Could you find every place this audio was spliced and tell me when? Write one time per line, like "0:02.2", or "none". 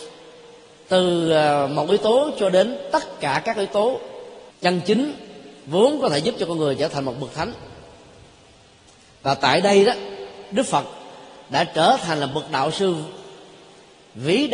0:04.5